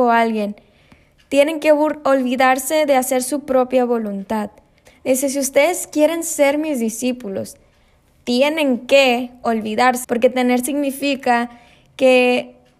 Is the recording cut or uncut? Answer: cut